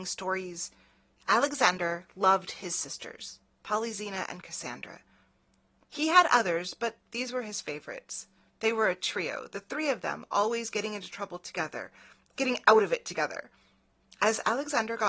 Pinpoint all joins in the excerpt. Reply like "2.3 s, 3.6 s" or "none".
12.3 s